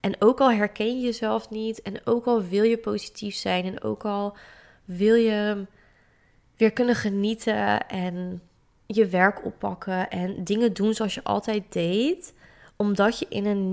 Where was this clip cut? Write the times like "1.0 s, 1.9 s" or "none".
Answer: none